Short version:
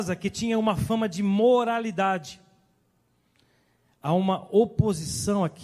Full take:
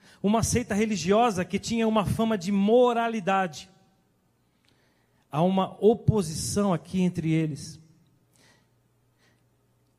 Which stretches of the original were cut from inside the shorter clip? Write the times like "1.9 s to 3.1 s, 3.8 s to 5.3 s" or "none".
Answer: none